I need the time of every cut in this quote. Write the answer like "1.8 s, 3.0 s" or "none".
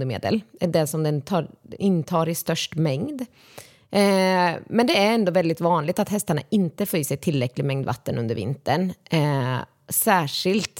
1.8 s

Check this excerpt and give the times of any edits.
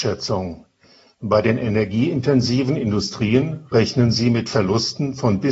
none

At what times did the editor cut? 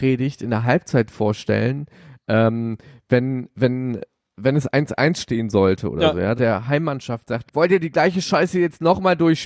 6.3 s, 7.5 s

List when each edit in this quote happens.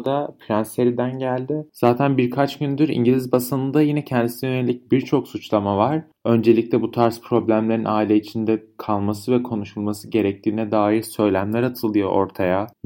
1.7 s

